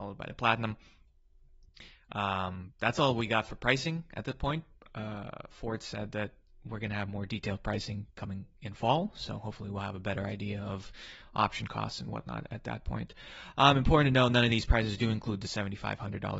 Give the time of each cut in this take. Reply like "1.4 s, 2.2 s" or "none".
none